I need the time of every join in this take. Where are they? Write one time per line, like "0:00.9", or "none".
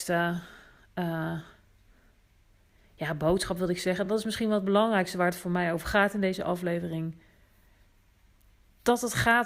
none